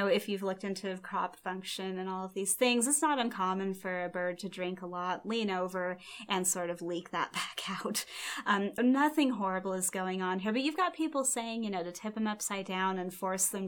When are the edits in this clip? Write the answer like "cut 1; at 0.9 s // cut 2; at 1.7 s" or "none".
cut 1; at 8.8 s